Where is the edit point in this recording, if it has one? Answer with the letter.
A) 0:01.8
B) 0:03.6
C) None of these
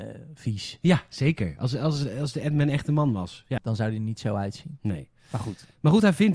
B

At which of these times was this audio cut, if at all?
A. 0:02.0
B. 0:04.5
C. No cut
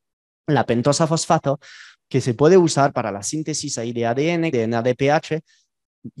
B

